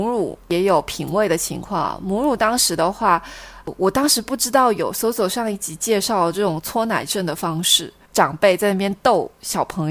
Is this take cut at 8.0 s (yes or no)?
yes